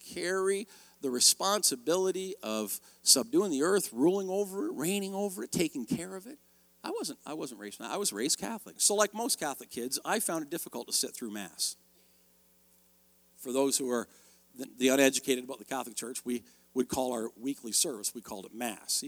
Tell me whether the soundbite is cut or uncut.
cut